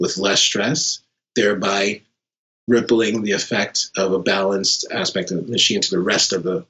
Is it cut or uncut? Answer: uncut